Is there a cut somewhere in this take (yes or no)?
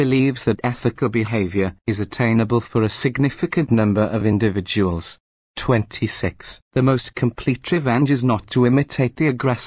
no